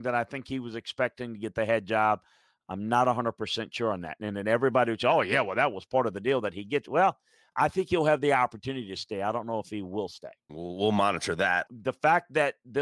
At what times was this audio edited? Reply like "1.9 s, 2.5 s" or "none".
10.5 s, 11.7 s